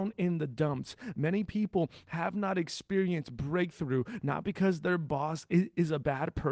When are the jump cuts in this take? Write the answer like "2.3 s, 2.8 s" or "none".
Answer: 1.1 s, 4.2 s